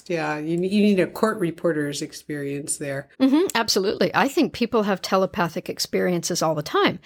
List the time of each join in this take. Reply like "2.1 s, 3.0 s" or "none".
3.1 s